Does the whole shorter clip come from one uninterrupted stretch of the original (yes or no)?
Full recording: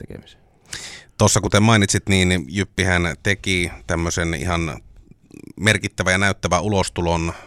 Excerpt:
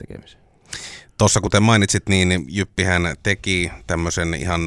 yes